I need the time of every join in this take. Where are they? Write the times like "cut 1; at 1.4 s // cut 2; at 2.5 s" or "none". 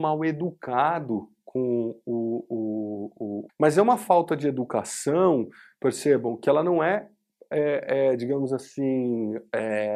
cut 1; at 3.5 s

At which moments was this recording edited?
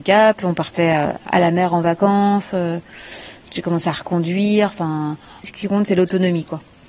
cut 1; at 5.4 s

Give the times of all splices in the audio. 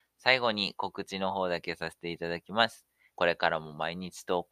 cut 1; at 3.1 s

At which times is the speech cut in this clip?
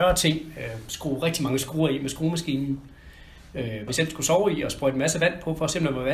cut 1; at 3.9 s

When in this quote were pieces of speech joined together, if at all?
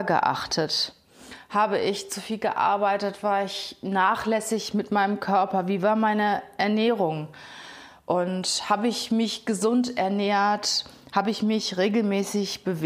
none

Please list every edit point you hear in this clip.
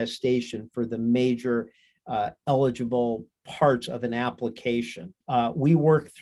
cut 1; at 5.2 s

